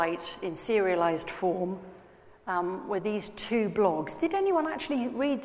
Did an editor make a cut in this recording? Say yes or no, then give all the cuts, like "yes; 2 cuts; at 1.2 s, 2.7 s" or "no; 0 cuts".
no; 0 cuts